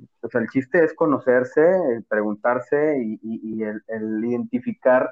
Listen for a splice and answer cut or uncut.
uncut